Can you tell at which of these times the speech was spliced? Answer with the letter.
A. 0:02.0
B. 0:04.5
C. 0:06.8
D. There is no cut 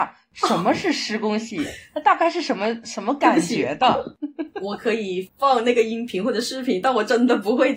D